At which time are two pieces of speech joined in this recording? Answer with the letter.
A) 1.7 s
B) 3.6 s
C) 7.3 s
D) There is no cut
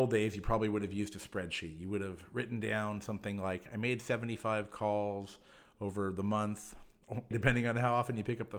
C